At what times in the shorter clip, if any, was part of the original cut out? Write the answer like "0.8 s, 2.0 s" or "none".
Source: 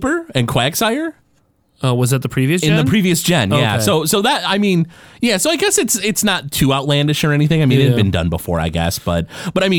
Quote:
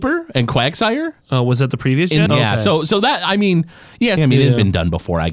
1.2 s, 2.3 s, 4.2 s